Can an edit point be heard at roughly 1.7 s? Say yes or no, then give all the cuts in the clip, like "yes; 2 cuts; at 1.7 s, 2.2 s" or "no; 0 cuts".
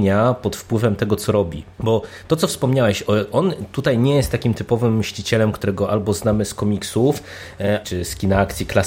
yes; 2 cuts; at 1.7 s, 7.8 s